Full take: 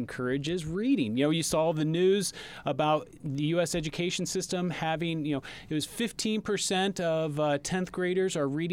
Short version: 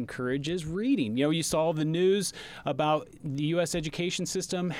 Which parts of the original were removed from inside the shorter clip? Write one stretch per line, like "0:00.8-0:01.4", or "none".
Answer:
none